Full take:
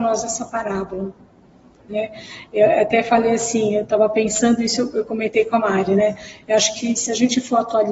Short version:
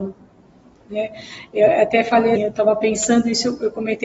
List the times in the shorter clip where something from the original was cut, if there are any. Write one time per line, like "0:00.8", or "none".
0:02.4